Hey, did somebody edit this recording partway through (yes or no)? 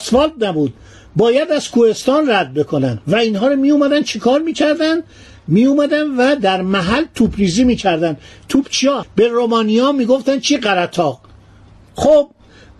yes